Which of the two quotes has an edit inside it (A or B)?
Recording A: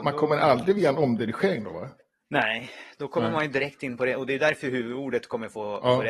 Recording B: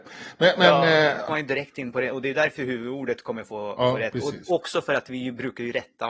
B